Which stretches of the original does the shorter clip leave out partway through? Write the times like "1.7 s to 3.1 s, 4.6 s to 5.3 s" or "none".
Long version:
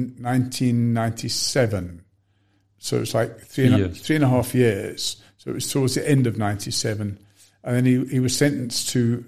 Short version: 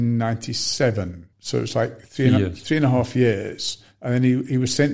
2.1 s to 2.7 s, 5.3 s to 7.6 s